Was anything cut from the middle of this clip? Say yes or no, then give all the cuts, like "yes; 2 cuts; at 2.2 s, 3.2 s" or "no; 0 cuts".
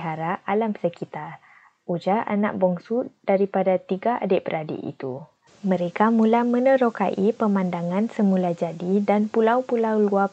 yes; 1 cut; at 5.5 s